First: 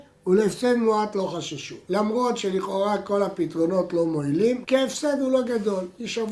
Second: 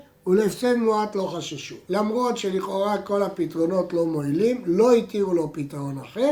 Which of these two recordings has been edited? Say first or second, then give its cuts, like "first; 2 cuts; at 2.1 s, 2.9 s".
first; 1 cut; at 4.6 s